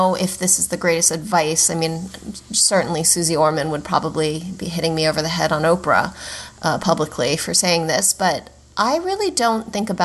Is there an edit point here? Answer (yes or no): no